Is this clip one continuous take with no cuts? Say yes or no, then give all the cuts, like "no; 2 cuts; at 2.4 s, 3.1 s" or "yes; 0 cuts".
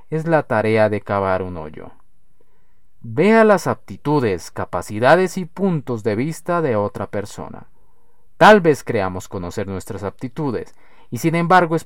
yes; 0 cuts